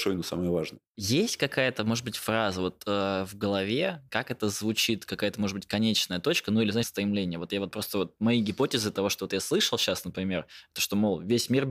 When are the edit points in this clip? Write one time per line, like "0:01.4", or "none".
0:00.9
0:06.8